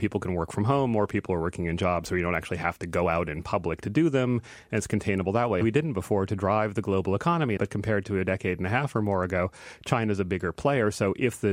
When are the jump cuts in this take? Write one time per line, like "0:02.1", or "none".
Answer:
0:05.6
0:07.6